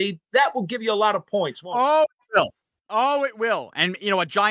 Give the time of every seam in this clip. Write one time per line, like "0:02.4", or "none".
none